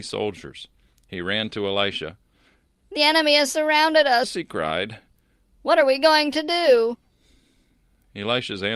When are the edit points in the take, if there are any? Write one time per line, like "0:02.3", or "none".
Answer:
none